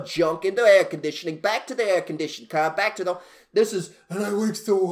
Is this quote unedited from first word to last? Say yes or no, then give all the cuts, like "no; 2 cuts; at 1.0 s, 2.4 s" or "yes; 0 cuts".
yes; 0 cuts